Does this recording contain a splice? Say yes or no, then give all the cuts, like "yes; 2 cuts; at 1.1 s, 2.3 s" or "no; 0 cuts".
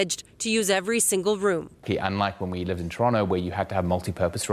no; 0 cuts